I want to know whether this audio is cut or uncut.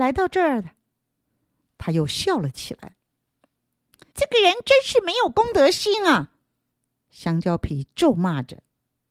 cut